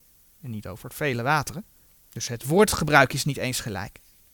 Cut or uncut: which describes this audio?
uncut